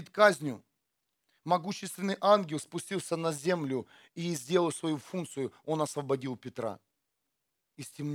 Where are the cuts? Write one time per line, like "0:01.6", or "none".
none